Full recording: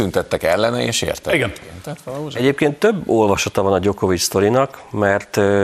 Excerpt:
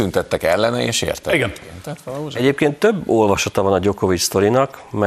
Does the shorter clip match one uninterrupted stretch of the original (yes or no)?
yes